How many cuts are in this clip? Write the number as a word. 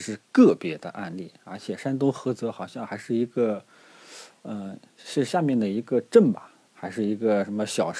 one